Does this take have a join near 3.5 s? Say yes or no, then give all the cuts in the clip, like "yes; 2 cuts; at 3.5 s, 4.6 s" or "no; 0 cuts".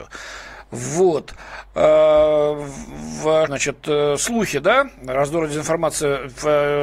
yes; 1 cut; at 3.5 s